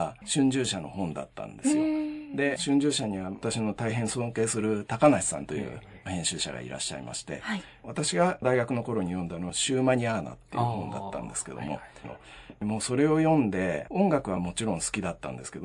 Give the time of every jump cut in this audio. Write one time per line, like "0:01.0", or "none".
0:12.0